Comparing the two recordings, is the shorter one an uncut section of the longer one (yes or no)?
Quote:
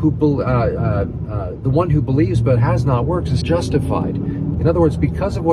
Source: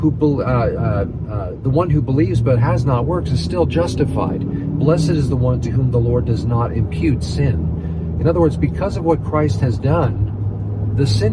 no